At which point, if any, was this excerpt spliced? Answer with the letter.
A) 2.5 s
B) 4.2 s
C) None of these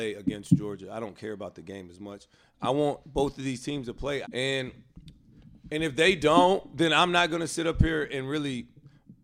B